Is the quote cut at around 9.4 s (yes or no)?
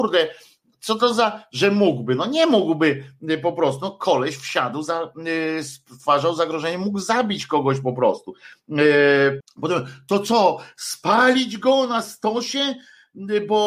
yes